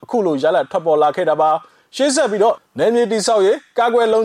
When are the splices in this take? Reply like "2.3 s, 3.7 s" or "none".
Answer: 2.7 s